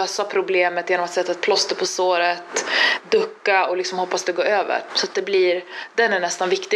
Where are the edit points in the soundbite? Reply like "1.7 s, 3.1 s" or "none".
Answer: 4.9 s